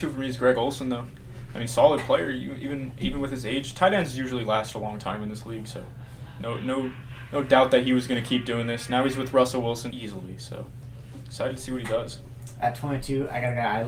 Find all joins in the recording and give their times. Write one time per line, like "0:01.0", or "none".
0:09.9